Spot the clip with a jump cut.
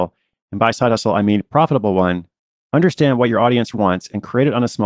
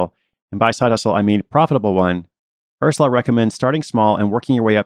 first; 2 cuts; at 2.6 s, 3.7 s

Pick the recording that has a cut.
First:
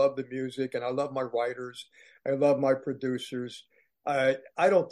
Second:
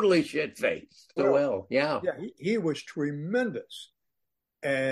second; 1 cut; at 1.2 s

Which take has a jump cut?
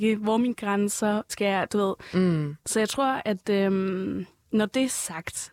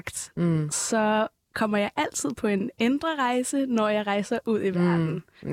first; 1 cut; at 1.3 s

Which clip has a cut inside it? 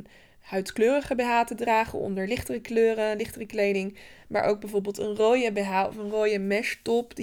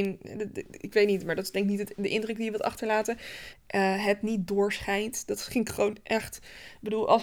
second; 1 cut; at 3.5 s

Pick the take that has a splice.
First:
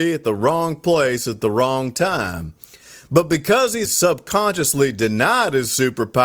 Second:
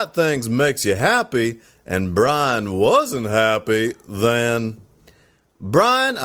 first; 1 cut; at 3.9 s

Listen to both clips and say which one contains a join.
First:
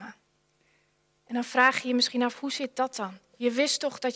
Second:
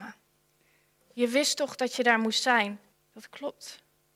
second; 2 cuts; at 1.0 s, 2.9 s

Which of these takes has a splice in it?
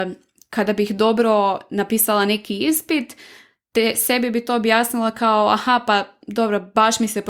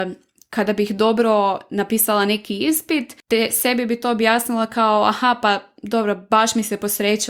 second; 1 cut; at 3.2 s

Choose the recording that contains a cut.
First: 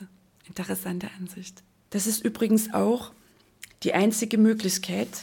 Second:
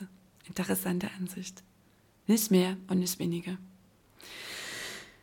first; 1 cut; at 1.8 s

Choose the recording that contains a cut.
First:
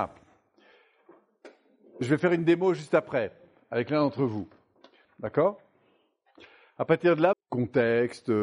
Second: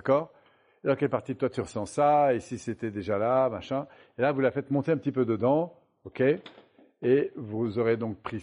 first; 2 cuts; at 5.0 s, 7.3 s

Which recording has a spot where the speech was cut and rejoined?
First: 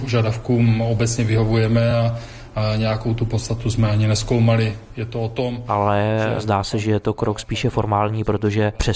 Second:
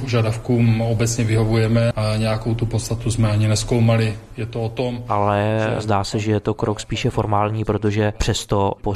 second; 1 cut; at 1.9 s

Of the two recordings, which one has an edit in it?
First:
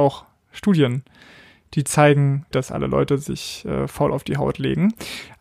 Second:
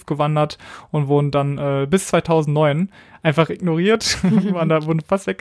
first; 1 cut; at 2.5 s

